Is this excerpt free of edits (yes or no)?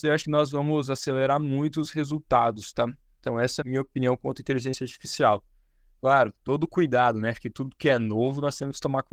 no